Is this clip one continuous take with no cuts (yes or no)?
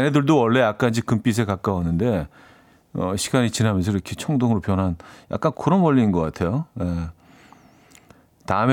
no